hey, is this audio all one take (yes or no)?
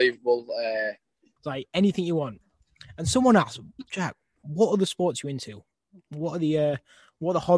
no